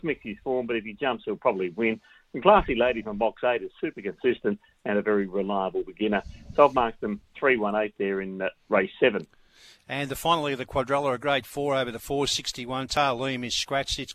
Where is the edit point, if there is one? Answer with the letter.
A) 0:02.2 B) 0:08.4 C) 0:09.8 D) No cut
D